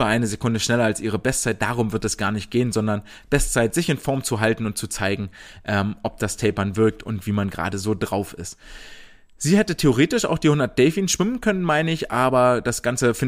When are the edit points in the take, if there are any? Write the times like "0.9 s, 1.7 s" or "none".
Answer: none